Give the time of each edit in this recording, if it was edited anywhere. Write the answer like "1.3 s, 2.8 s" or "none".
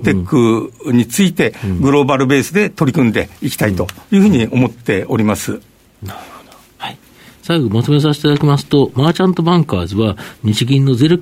none

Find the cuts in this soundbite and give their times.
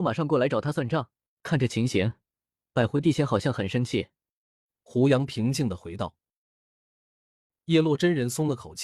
none

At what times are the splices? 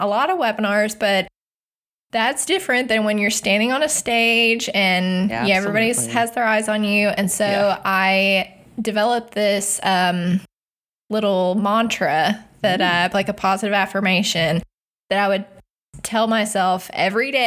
none

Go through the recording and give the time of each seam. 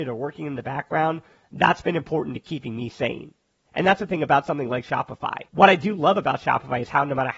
5.5 s

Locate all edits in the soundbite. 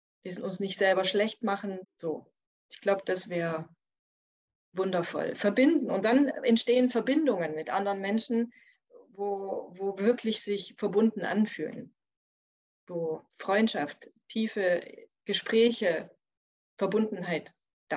1.8 s, 13.3 s

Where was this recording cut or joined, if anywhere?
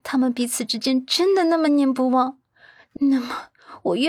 1.7 s

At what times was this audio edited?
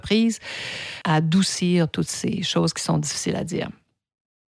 1.0 s

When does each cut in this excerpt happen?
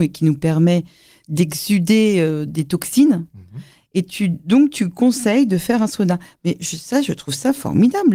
none

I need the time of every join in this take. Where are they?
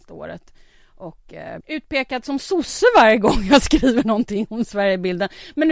1.6 s

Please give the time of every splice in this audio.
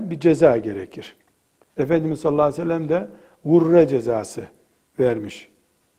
1.7 s

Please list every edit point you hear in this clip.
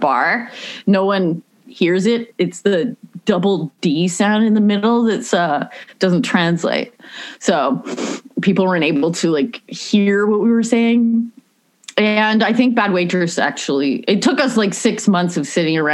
none

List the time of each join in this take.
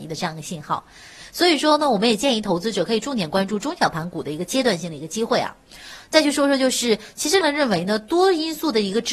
7.4 s

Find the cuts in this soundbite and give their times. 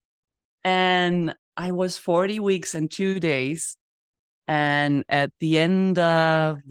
none

